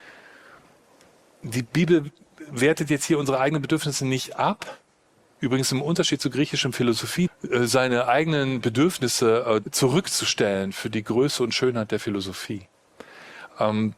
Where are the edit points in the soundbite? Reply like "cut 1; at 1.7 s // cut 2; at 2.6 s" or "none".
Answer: cut 1; at 7.3 s // cut 2; at 9.6 s